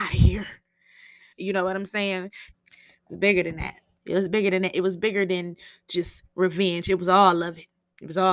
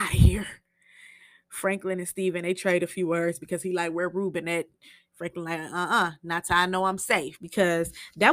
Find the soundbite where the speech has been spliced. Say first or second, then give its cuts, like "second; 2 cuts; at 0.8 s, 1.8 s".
first; 2 cuts; at 1.3 s, 2.5 s